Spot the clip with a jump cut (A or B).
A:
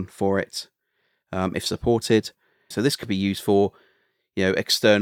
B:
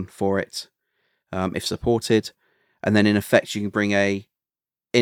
A